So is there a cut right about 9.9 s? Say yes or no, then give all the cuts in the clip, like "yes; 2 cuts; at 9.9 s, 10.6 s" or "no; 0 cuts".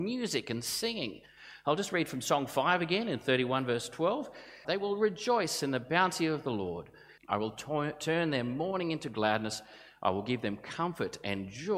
no; 2 cuts; at 4.6 s, 7.2 s